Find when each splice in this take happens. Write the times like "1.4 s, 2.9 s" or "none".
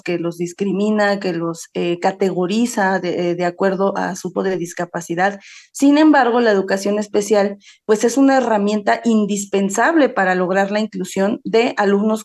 4.3 s